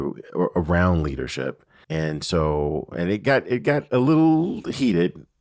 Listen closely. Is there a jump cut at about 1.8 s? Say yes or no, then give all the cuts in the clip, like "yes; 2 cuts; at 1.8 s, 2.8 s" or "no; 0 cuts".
yes; 1 cut; at 1.8 s